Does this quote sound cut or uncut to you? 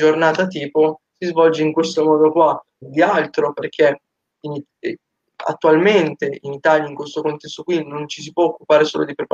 cut